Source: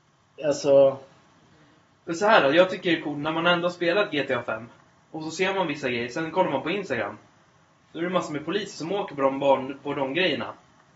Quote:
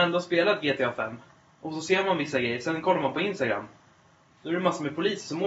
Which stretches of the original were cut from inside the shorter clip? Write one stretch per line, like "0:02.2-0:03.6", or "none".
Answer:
none